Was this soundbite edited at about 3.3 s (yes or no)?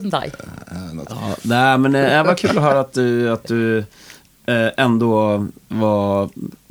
no